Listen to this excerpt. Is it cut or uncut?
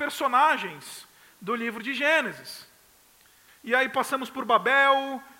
cut